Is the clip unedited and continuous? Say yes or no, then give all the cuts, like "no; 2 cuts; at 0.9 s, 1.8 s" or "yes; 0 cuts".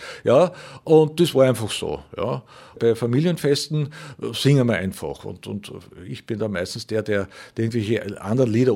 no; 1 cut; at 2.7 s